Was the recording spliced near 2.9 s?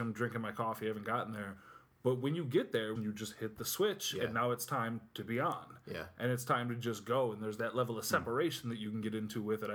yes; 1 cut; at 2.9 s

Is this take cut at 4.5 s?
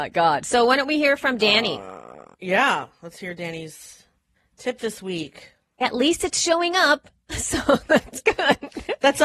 no; 2 cuts; at 2.3 s, 5.8 s

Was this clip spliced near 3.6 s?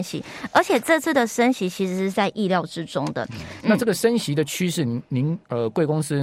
yes; 1 cut; at 3.6 s

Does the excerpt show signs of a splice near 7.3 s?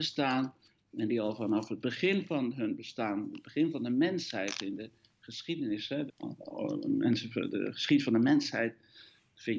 no; 1 cut; at 6.1 s

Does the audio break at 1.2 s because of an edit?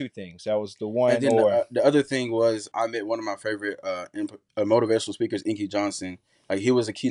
no; 1 cut; at 2.7 s

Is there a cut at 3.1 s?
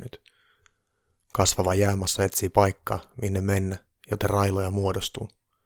no; 0 cuts

